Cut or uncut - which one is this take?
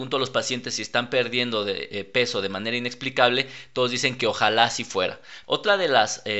cut